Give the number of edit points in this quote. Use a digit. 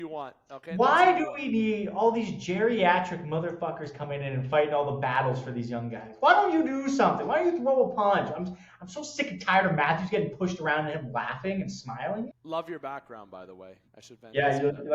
1